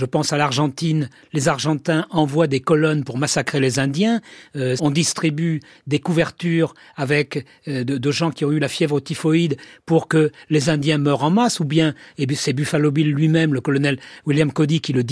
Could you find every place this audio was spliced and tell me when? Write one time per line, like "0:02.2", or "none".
0:04.8